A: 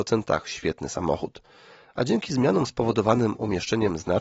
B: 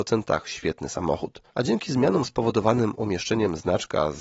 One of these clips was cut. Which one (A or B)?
B